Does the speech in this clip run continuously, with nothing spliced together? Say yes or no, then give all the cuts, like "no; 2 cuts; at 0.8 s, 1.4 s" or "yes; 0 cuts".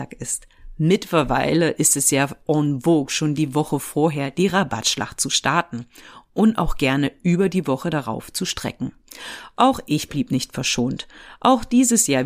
yes; 0 cuts